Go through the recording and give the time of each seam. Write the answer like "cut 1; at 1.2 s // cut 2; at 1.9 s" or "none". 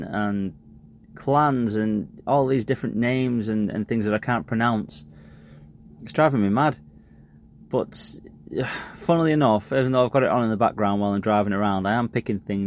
none